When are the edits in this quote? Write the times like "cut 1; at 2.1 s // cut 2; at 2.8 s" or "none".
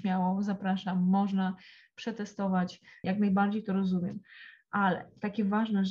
cut 1; at 3.0 s